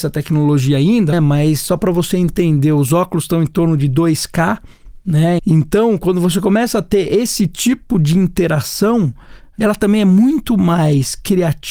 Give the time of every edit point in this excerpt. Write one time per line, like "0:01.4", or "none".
0:01.1
0:05.4